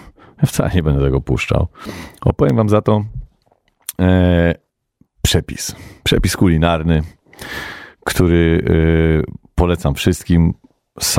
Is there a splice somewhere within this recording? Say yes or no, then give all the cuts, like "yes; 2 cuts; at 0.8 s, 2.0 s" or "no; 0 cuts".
no; 0 cuts